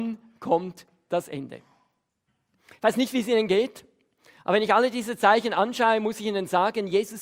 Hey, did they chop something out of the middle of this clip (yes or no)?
no